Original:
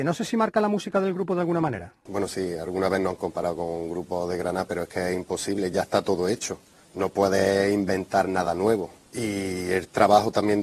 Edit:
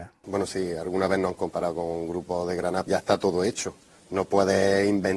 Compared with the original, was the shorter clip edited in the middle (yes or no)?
yes